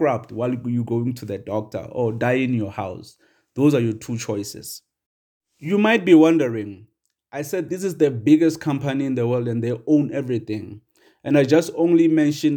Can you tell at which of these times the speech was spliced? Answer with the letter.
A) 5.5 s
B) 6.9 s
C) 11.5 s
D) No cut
D